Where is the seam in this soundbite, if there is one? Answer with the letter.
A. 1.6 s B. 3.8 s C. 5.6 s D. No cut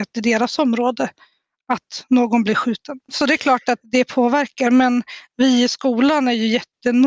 B